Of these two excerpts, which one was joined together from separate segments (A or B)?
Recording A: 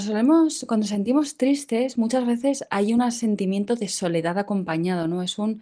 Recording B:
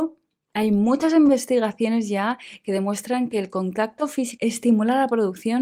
B